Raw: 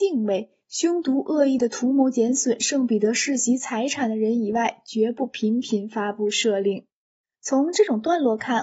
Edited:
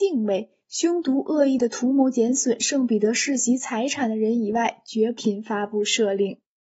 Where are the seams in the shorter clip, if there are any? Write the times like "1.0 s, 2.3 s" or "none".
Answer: 5.2 s